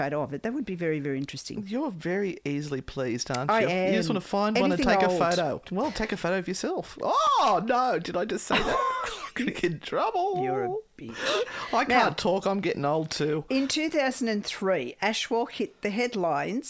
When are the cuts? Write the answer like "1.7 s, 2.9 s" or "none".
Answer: 5.6 s